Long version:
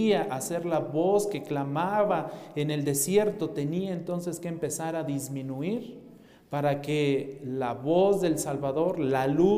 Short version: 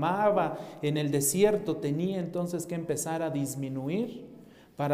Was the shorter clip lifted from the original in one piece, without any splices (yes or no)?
yes